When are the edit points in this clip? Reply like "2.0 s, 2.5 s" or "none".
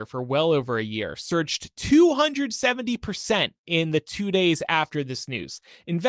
none